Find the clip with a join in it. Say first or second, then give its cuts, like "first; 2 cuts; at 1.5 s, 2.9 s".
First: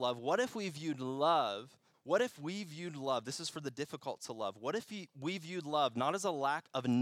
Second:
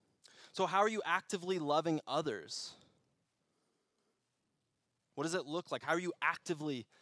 first; 1 cut; at 1.9 s